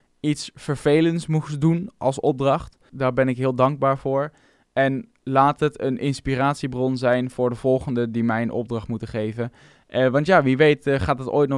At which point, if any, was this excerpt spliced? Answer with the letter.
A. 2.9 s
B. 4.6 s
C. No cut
A